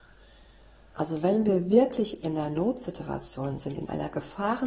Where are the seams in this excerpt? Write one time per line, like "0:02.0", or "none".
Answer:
0:00.9